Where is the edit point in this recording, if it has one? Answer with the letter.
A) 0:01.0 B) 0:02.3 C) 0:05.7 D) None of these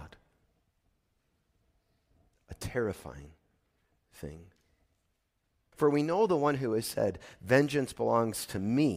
C